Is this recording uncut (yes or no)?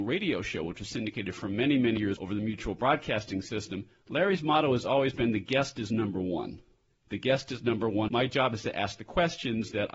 yes